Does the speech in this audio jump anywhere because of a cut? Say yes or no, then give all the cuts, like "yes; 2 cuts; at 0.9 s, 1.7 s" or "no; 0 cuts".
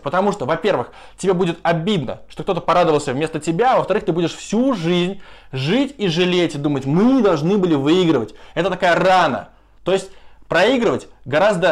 no; 0 cuts